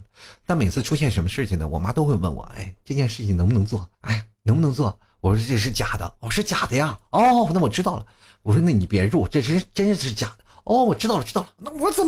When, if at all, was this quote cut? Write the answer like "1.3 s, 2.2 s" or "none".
3.9 s